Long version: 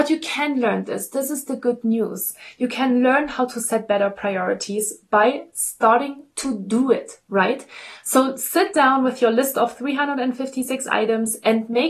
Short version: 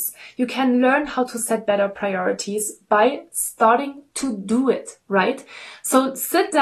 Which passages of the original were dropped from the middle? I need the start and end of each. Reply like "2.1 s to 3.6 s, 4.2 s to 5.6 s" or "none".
none